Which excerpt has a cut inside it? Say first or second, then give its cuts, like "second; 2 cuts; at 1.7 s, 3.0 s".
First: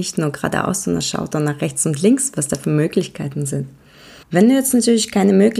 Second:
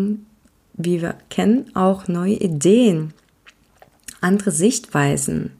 first; 1 cut; at 4.2 s